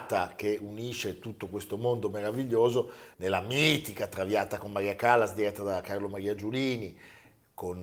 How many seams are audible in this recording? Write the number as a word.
one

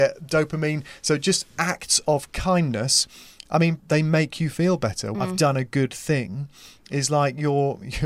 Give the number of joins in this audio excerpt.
two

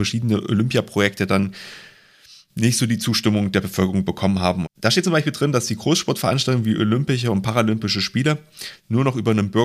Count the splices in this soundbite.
one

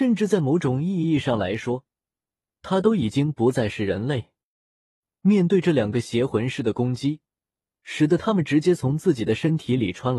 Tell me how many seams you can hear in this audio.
one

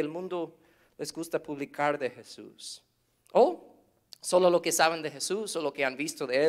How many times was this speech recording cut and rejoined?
zero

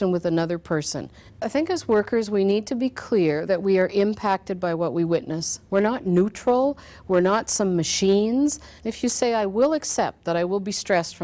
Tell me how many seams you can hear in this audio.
two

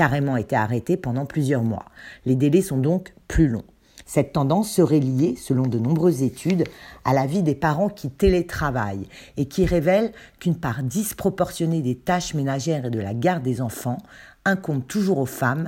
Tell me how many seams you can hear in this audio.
one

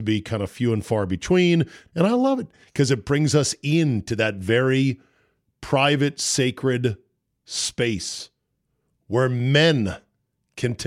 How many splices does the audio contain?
one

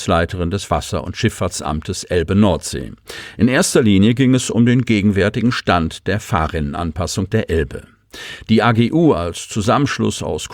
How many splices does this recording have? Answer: zero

